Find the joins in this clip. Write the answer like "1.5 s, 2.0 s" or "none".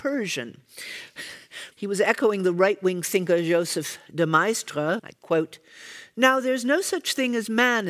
1.7 s, 5.0 s